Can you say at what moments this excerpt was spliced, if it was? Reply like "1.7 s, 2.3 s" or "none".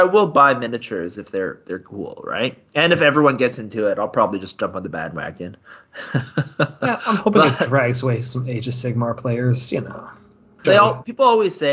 10.6 s